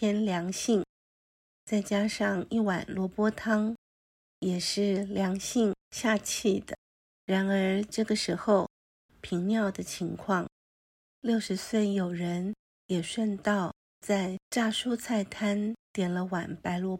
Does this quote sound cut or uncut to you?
cut